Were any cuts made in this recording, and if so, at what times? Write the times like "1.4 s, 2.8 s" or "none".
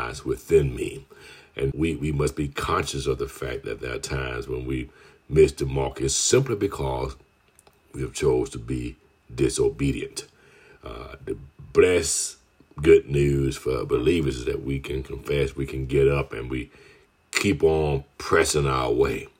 1.7 s